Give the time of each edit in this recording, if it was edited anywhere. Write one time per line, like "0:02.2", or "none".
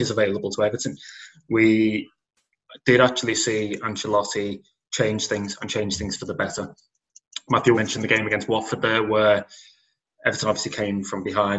0:07.7